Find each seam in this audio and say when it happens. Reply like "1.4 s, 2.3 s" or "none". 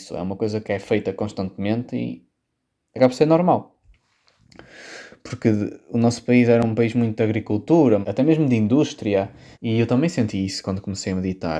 8.0 s, 9.5 s